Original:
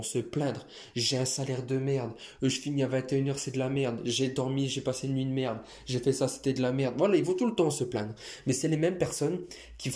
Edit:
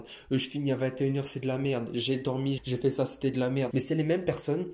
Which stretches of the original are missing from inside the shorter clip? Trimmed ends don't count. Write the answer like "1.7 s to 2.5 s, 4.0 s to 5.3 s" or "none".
4.7 s to 5.8 s, 6.9 s to 8.4 s